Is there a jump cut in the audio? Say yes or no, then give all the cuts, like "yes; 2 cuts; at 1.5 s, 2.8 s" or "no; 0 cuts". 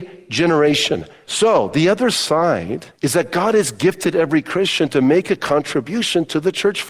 yes; 2 cuts; at 1.2 s, 2.9 s